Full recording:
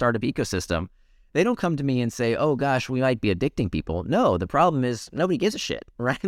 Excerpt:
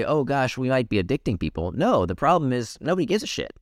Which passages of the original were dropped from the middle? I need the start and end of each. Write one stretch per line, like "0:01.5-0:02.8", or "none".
none